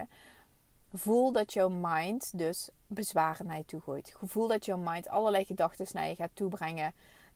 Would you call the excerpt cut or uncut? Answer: uncut